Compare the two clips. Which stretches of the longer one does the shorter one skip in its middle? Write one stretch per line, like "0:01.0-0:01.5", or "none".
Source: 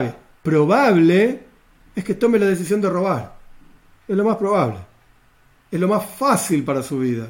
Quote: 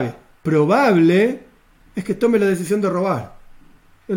none